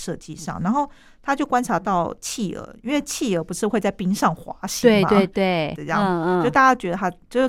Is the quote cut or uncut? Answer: cut